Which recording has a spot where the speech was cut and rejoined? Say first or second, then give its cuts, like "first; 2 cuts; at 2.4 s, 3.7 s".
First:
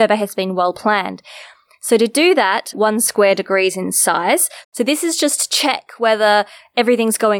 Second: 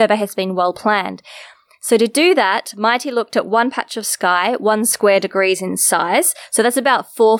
first; 2 cuts; at 2.7 s, 4.6 s